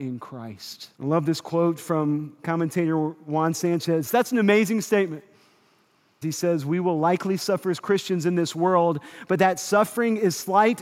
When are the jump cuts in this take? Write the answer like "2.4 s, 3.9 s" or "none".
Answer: 0.9 s, 4.1 s, 6.2 s